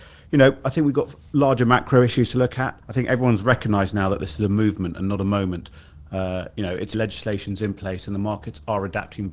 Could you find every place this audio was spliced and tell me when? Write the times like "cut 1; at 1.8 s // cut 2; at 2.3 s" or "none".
cut 1; at 2.8 s // cut 2; at 6.9 s